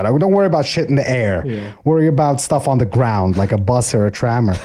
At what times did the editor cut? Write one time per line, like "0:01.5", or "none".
none